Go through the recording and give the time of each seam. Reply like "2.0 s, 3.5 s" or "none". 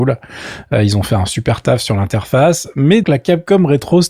3.0 s